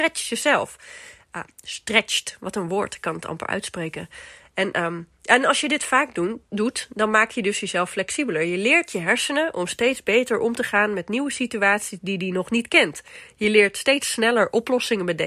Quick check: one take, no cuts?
yes; 0 cuts

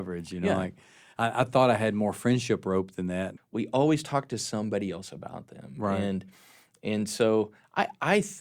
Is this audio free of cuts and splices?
no; 1 cut; at 3.4 s

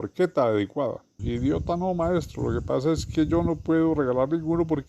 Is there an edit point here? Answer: yes; 1 cut; at 1.2 s

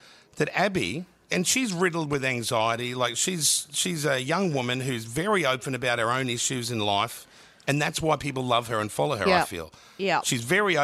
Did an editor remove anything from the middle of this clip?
no; 0 cuts

